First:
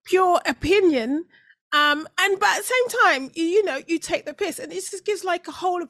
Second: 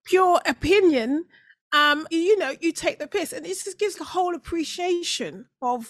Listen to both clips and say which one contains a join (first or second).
second